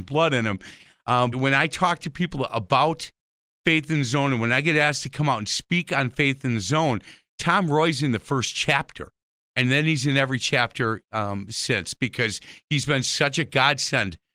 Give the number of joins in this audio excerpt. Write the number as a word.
one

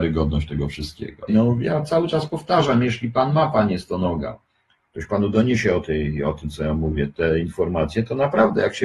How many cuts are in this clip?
one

